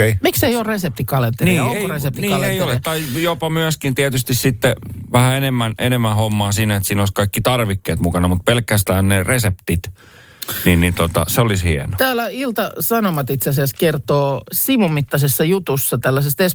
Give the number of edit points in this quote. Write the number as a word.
zero